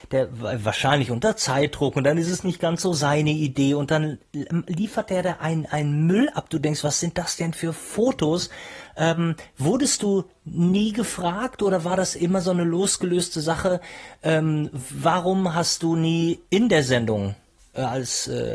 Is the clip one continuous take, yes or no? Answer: yes